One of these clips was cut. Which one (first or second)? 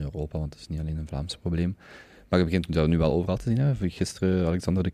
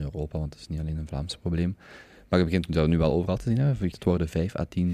second